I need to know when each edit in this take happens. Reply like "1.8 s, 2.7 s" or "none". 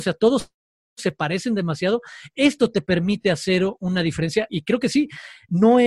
4.5 s